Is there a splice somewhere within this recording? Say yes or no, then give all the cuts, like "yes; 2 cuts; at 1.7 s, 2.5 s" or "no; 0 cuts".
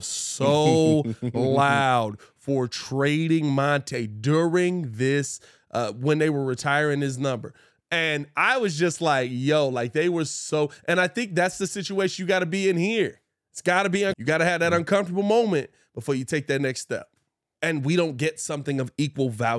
yes; 2 cuts; at 14.1 s, 17.5 s